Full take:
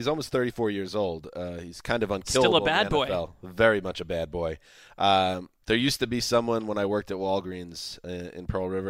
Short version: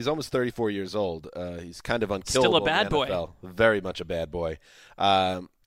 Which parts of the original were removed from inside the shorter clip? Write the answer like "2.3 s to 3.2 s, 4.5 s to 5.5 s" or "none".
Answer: none